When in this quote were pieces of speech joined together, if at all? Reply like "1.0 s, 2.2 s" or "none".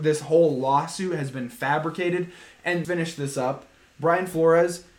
2.8 s